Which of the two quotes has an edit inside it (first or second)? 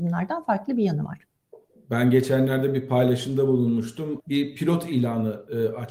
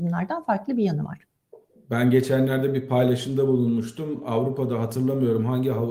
first